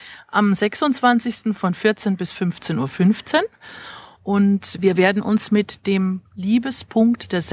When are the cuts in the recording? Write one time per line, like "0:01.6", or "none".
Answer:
none